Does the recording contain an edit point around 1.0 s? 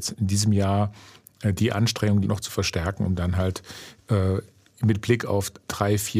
no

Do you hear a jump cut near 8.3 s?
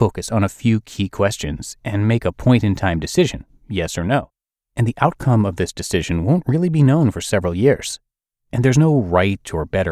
yes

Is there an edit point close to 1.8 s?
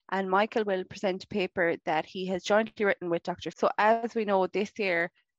no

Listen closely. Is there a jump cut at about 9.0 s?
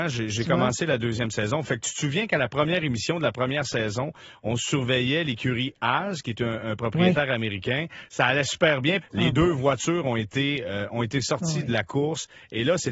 yes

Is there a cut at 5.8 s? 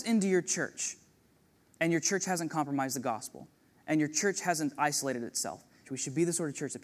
yes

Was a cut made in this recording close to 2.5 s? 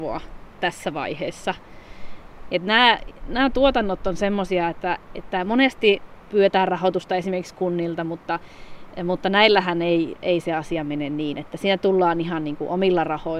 yes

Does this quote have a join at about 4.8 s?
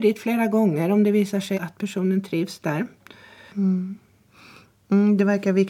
no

